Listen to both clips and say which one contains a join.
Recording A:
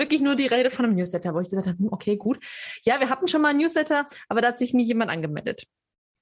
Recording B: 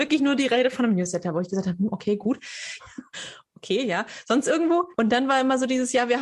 B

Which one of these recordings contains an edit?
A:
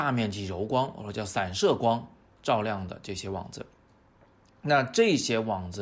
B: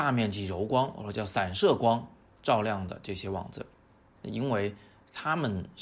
B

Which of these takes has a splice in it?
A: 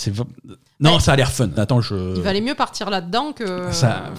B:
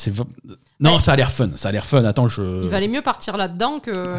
A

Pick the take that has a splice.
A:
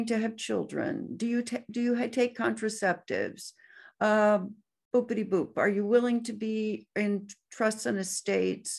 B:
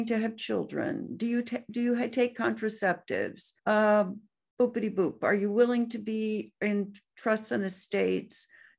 B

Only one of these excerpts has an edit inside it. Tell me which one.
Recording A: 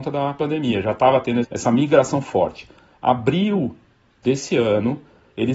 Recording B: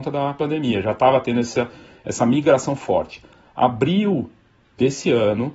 A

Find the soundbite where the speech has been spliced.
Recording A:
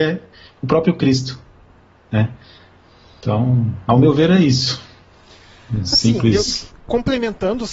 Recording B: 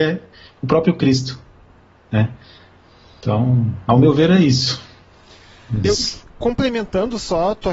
B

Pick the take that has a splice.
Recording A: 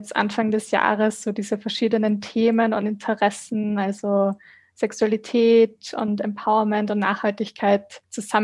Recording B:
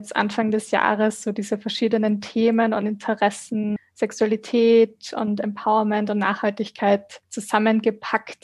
B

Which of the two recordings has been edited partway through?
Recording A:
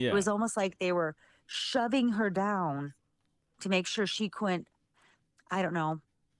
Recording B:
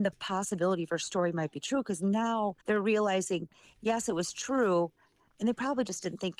B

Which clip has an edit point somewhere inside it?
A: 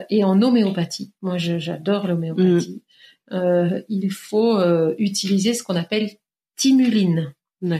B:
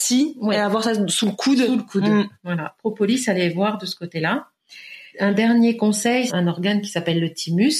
B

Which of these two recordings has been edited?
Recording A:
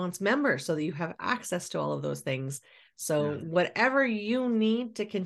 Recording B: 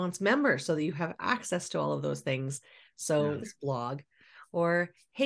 B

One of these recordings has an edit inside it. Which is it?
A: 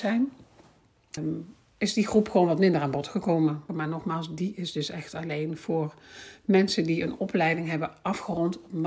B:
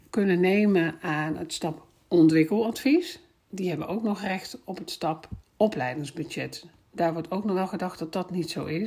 A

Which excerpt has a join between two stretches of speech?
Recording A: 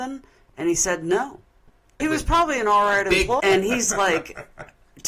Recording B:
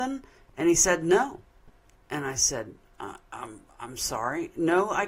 A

